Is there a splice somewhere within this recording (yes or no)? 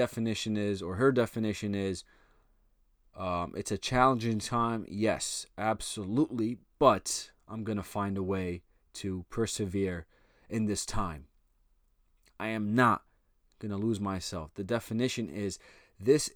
no